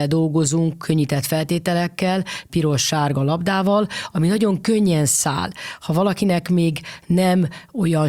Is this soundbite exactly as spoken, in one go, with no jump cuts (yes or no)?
no